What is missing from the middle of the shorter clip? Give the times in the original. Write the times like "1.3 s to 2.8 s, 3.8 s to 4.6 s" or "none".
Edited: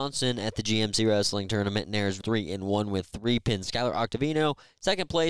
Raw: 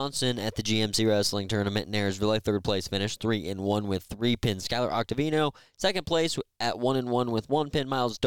2.2 s to 3.2 s